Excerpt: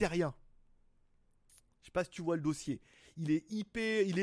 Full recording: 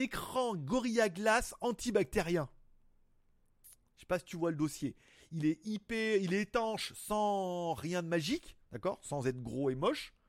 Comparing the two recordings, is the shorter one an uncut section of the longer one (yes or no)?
yes